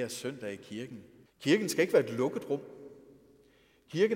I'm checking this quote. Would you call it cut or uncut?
cut